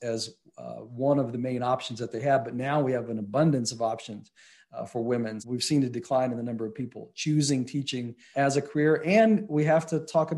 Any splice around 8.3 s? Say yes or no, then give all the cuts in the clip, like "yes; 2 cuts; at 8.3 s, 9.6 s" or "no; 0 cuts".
yes; 2 cuts; at 5.4 s, 8.3 s